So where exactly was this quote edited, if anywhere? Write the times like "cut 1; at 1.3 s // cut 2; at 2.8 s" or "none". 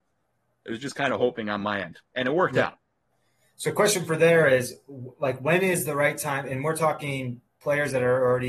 none